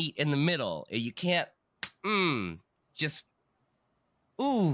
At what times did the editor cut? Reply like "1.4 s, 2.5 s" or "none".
none